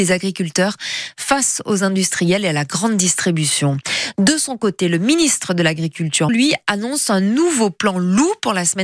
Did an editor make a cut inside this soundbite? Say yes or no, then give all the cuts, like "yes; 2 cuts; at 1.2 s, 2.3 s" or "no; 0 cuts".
yes; 1 cut; at 6.3 s